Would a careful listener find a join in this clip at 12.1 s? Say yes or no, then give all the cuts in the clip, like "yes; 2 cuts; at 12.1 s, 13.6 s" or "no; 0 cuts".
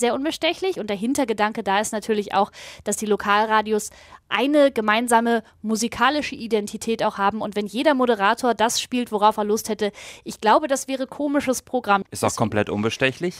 yes; 1 cut; at 12.1 s